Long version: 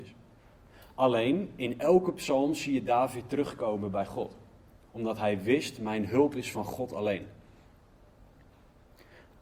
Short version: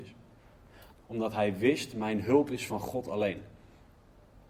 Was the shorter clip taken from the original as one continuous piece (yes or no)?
no